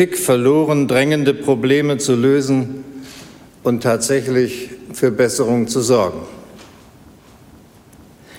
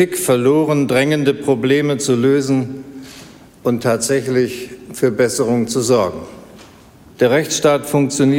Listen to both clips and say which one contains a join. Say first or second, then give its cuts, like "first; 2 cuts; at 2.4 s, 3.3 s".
second; 1 cut; at 7.1 s